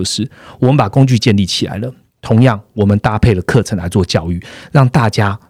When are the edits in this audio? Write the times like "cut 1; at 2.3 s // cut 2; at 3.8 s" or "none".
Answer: none